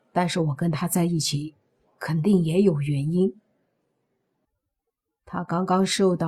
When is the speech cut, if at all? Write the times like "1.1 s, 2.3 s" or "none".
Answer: 4.4 s